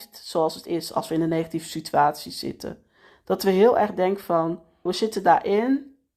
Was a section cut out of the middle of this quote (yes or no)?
yes